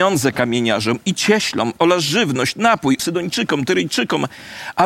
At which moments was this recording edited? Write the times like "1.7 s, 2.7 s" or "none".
3.0 s